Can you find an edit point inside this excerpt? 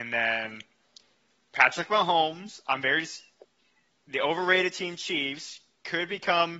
no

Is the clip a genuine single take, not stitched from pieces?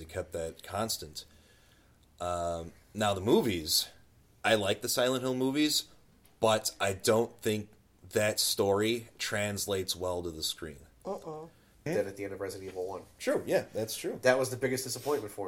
no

